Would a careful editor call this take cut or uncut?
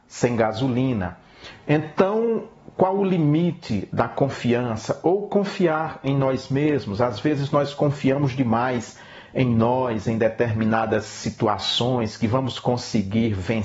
uncut